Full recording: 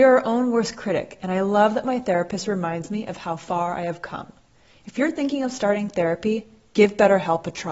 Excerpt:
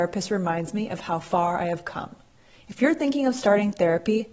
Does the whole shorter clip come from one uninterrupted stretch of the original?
yes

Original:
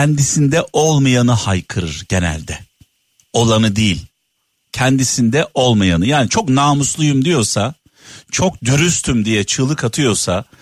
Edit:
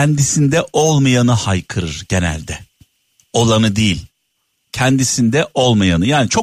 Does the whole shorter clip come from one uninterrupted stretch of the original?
yes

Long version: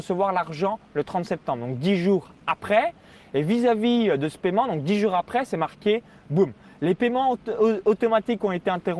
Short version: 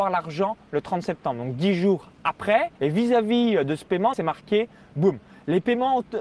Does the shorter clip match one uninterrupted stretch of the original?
no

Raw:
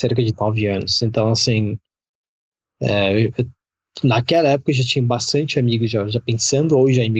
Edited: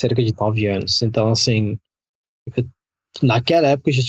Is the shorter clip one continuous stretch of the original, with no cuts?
no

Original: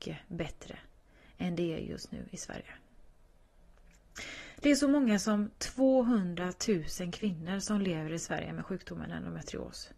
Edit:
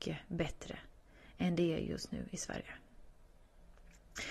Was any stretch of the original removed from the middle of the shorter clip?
no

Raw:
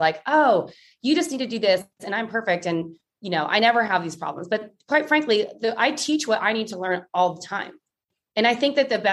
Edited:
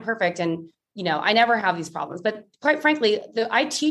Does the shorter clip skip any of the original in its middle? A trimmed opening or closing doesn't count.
no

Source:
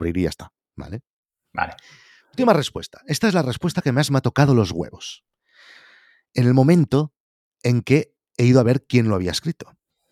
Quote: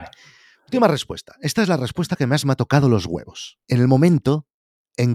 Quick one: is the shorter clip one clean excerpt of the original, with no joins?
no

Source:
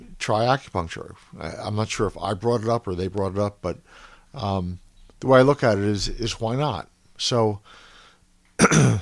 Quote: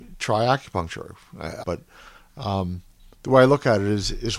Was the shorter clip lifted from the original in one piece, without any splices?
no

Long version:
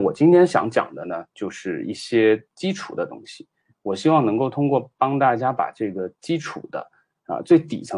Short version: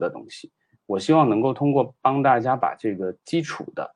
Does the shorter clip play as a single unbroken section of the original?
yes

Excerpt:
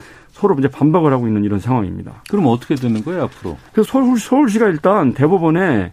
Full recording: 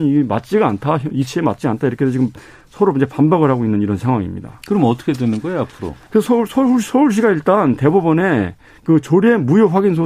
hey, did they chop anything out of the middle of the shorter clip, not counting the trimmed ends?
yes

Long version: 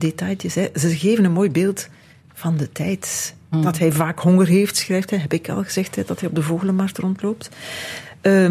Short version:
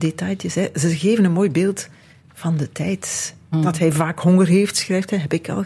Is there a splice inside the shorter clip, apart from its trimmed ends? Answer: no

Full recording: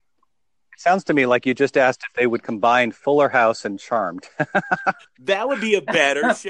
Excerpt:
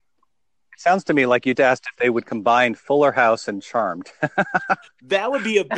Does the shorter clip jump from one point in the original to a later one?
yes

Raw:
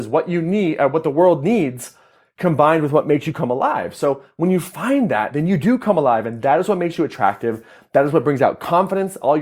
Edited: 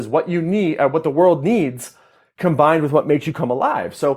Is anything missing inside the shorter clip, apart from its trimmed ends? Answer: no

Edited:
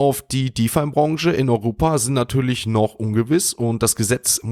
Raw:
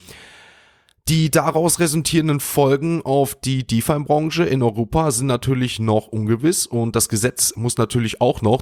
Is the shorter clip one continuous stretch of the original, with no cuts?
yes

